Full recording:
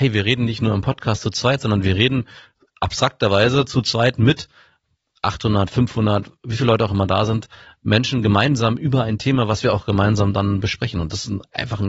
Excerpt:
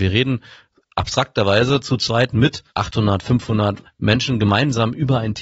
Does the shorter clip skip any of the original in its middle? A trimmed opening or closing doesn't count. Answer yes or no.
yes